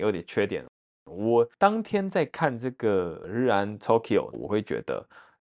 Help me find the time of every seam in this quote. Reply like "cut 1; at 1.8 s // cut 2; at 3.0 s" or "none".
cut 1; at 4.3 s